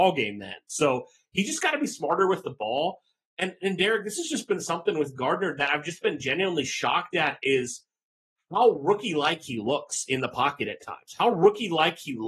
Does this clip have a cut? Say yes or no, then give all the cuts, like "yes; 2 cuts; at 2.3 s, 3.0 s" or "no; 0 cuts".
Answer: no; 0 cuts